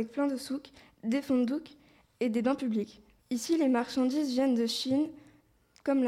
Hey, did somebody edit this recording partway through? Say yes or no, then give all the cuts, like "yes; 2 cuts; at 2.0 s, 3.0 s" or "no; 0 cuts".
yes; 1 cut; at 3.2 s